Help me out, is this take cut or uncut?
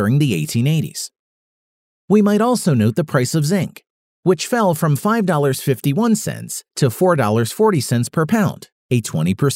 uncut